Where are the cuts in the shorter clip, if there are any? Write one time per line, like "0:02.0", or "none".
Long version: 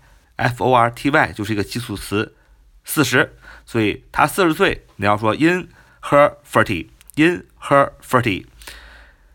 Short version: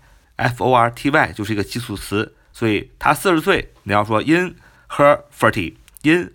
0:02.5